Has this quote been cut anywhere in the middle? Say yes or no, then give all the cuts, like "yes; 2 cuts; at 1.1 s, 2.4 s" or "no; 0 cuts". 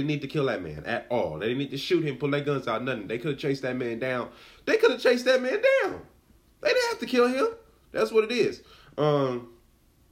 no; 0 cuts